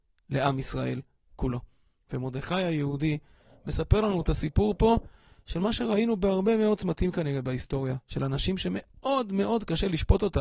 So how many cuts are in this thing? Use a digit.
0